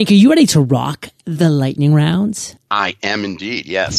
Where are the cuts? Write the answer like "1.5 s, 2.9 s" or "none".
none